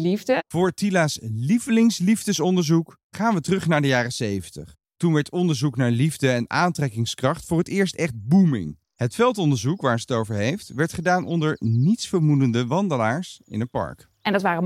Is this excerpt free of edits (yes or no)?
yes